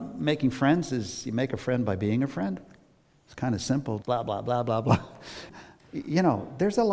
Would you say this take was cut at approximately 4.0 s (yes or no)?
yes